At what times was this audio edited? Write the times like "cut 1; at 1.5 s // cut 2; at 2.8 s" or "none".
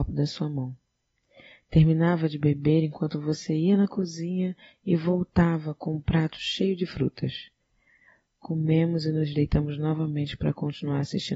none